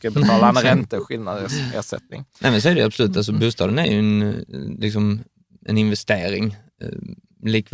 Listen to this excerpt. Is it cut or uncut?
uncut